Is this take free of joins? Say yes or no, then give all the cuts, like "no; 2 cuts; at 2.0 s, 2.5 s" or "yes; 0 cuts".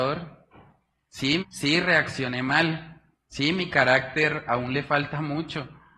no; 1 cut; at 1.4 s